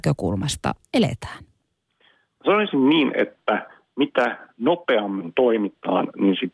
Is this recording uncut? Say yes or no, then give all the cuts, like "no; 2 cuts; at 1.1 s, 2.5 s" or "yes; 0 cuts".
yes; 0 cuts